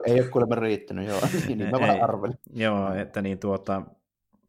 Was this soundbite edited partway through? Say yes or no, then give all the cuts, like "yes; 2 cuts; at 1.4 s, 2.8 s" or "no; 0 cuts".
no; 0 cuts